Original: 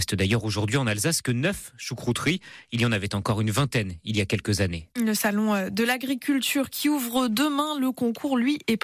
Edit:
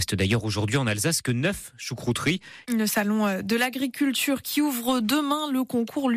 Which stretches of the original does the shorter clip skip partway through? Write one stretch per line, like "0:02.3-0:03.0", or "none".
0:02.6-0:04.9

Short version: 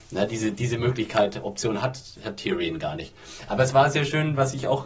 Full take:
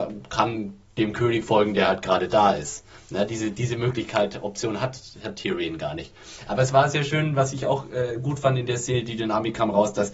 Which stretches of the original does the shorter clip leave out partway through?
none

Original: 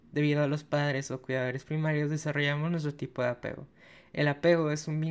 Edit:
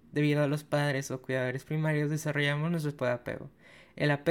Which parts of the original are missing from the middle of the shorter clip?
0:03.0-0:03.1

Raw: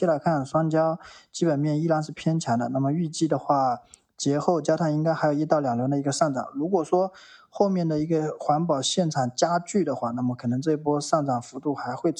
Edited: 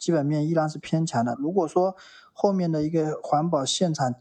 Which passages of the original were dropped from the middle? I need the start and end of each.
0:02.7-0:06.5

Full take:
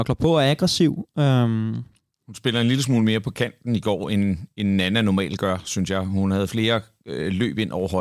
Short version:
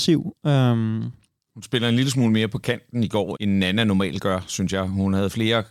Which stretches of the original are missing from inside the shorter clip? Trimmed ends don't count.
0:04.1-0:04.5

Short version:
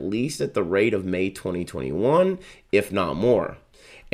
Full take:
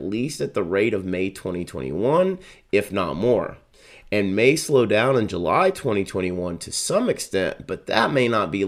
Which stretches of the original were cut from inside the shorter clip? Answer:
none

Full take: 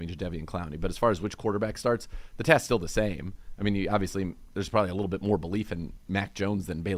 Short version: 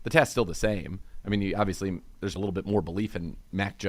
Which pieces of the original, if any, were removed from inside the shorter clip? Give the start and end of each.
0:04.7-0:04.9

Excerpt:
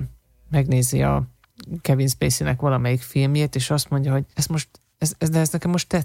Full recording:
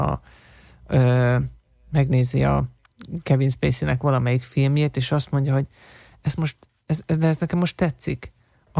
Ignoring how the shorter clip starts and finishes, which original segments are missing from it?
0:05.7-0:06.2

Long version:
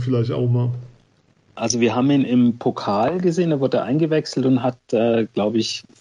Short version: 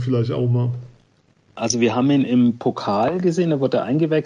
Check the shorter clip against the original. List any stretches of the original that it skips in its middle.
none

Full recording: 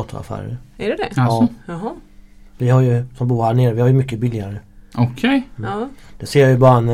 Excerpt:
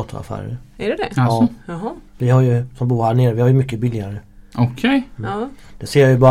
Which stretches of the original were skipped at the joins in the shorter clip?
0:02.1-0:02.5

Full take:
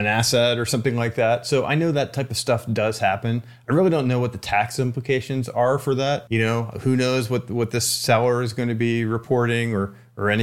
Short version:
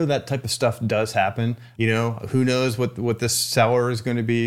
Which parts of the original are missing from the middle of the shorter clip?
0:03.6-0:06.3

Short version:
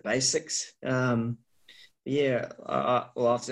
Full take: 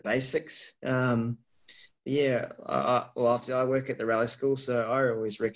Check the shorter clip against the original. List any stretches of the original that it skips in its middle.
none

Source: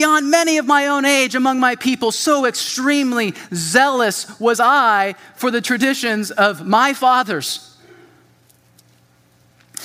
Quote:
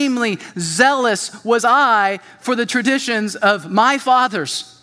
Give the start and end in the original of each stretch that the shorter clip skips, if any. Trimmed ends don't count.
none

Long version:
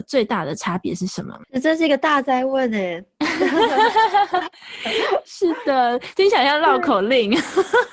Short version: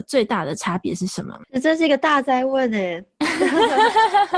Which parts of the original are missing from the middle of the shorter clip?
none

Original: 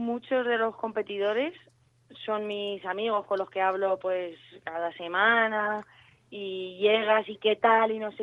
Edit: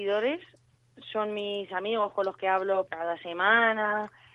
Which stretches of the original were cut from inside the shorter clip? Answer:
0:04.0-0:04.6

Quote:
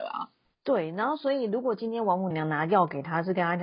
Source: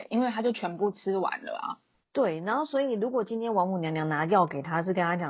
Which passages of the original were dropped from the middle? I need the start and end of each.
0:03.8-0:03.9

